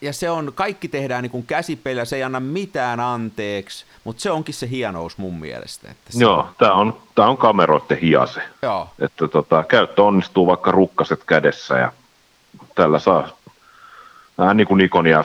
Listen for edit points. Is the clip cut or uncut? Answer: cut